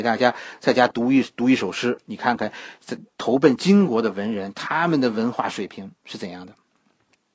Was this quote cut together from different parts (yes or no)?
no